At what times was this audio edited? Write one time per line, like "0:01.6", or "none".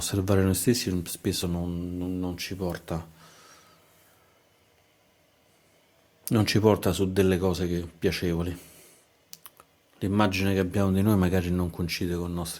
none